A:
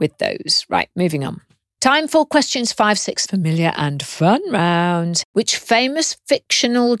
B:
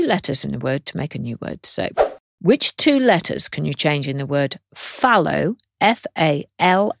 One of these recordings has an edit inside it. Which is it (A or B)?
A